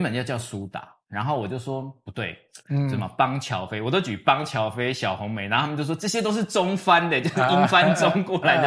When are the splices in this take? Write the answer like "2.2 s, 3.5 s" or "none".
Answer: 2.6 s